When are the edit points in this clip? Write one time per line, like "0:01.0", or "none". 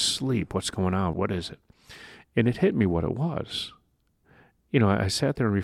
0:01.1